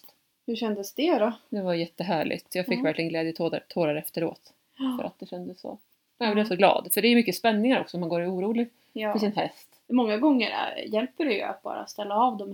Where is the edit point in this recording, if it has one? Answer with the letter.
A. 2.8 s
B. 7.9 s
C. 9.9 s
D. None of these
C